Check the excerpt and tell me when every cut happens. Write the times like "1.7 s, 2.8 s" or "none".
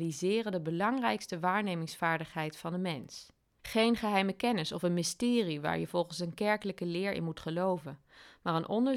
3.6 s